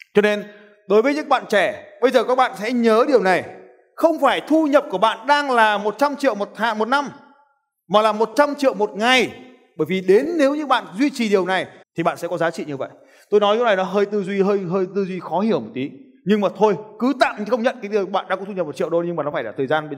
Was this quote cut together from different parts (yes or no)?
yes